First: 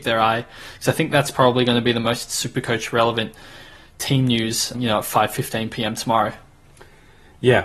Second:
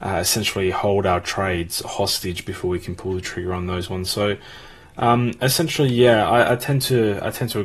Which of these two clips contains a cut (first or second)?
first